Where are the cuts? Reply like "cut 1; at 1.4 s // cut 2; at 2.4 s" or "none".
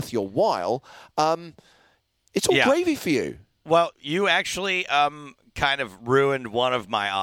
cut 1; at 3.9 s